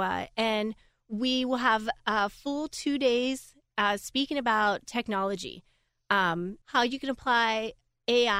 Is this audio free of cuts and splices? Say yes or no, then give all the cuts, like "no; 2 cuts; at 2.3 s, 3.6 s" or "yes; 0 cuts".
no; 1 cut; at 6.6 s